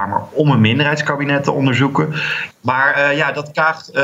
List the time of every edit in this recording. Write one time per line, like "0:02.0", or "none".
0:02.5